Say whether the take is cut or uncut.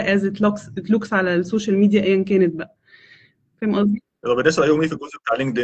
uncut